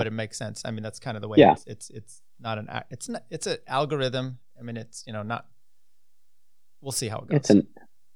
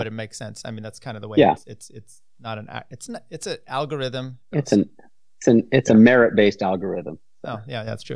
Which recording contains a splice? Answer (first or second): second